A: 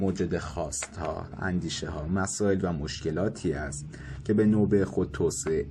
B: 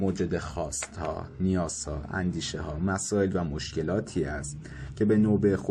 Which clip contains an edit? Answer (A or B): A